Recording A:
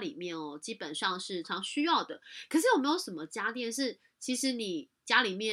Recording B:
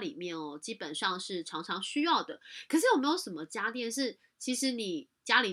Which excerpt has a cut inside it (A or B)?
A